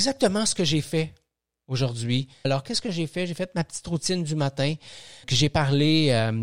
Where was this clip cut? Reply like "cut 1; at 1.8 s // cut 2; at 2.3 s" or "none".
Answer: cut 1; at 2.4 s // cut 2; at 5.2 s